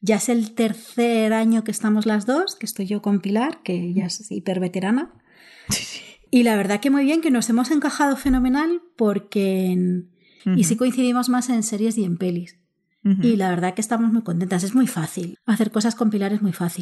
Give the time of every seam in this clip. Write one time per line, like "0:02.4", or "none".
0:10.4
0:15.3